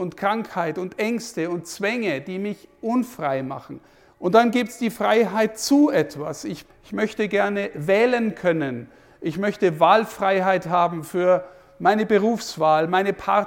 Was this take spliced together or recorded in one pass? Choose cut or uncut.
cut